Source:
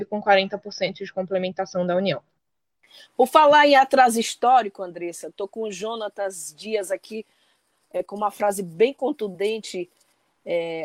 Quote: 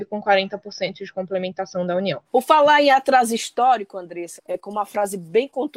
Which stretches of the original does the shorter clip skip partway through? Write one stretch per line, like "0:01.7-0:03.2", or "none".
0:02.2-0:03.1
0:05.2-0:07.8